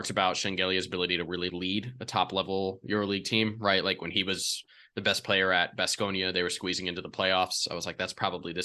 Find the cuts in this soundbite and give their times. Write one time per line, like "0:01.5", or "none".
0:01.5